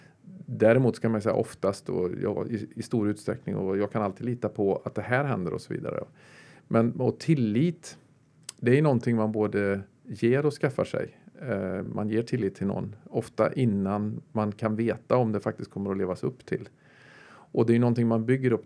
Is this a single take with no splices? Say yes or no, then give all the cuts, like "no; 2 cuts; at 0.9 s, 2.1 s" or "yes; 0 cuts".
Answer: yes; 0 cuts